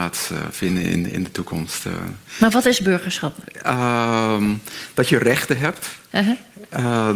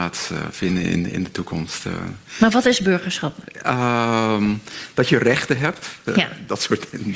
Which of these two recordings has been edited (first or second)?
second